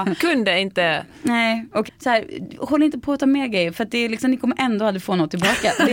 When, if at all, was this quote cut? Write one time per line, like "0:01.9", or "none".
0:01.9